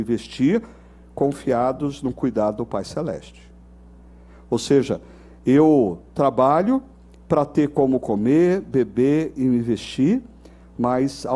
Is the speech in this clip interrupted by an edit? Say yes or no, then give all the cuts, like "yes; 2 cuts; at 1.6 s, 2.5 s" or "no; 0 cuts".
no; 0 cuts